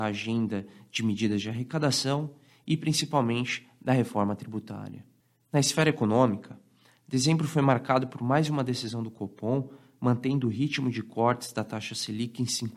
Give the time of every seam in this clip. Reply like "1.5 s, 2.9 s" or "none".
none